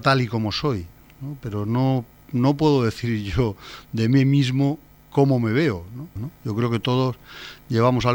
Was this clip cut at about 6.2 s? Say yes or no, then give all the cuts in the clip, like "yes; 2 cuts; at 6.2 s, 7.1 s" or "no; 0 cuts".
yes; 1 cut; at 6.2 s